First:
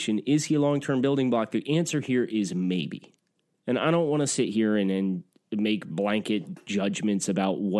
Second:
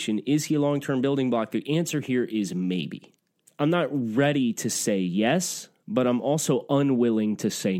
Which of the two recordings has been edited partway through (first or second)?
second